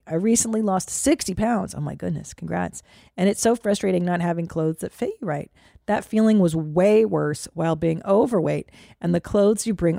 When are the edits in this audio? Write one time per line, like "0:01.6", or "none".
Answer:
none